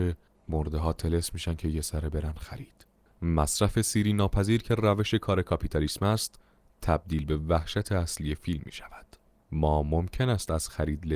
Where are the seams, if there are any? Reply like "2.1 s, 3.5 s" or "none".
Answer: none